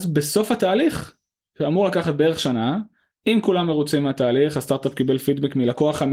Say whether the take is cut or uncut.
uncut